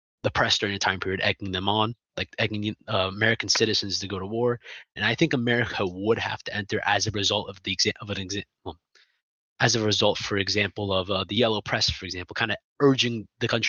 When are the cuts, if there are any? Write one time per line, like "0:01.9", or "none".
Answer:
0:05.0